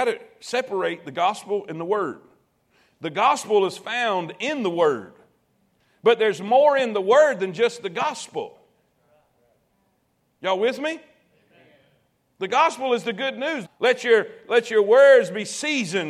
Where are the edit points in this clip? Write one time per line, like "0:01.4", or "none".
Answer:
0:13.6